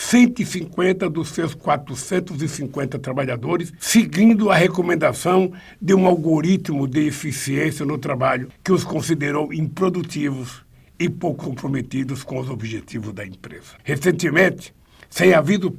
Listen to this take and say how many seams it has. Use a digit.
1